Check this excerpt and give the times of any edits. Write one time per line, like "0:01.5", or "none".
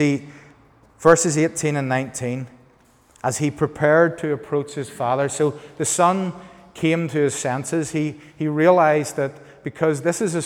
none